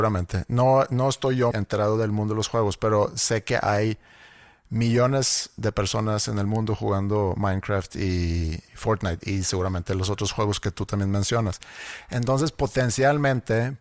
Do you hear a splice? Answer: yes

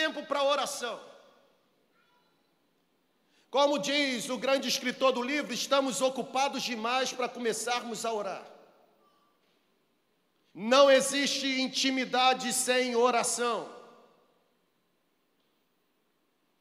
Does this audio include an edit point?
yes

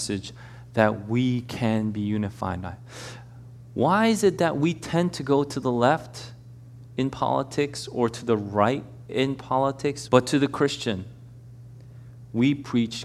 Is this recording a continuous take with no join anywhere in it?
no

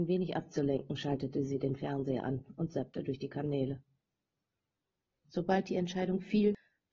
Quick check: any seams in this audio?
yes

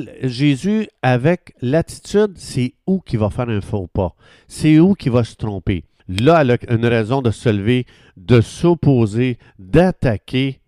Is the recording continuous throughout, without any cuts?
no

